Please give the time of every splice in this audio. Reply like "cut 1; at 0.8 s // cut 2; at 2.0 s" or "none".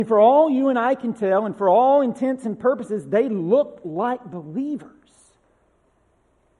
none